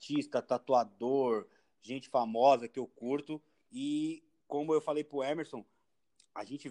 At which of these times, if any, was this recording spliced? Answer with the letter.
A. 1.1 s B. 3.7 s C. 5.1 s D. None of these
B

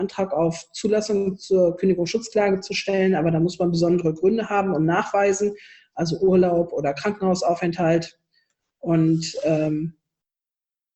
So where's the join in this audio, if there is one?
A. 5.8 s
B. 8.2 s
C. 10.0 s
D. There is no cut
D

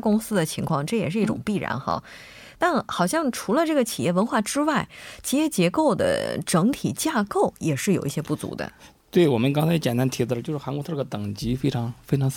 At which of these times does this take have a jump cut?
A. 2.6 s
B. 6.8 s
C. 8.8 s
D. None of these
D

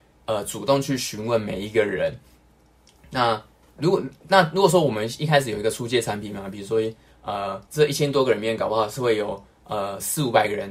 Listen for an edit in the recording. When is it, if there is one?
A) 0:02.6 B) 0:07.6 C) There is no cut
B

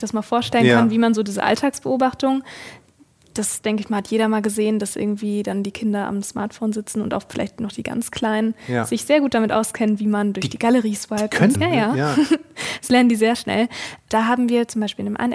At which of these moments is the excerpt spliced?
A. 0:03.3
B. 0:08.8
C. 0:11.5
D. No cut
C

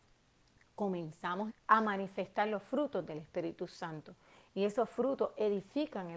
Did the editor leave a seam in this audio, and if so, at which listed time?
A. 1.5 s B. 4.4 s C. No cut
A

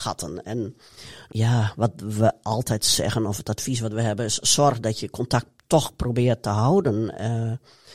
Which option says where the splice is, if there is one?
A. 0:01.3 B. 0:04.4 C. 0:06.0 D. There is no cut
A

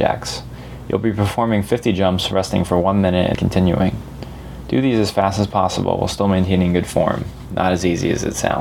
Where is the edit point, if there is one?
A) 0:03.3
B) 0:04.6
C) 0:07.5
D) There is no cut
A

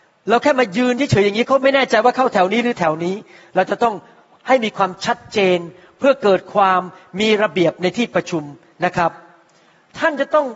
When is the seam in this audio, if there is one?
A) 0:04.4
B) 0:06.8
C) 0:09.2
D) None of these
D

